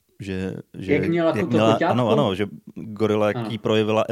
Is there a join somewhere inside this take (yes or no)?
no